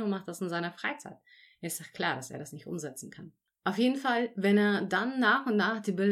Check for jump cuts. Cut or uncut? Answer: uncut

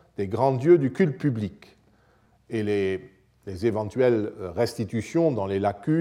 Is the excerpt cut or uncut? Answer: uncut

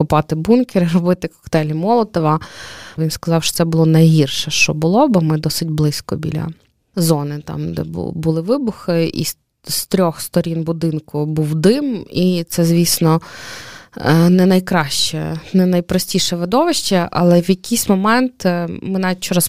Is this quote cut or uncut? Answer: cut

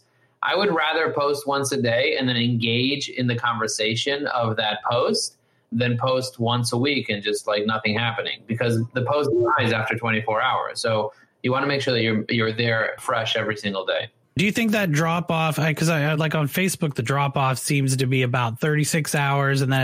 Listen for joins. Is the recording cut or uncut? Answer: uncut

